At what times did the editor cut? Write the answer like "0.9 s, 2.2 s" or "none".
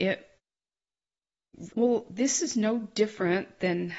1.7 s